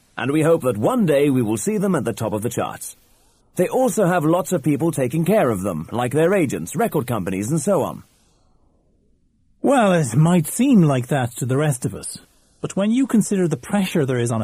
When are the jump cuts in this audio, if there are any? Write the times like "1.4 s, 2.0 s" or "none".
3.4 s